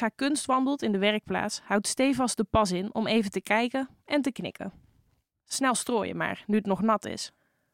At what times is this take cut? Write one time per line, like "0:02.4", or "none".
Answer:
0:05.3